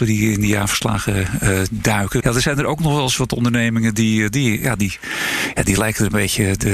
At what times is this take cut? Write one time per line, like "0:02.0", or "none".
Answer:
0:02.2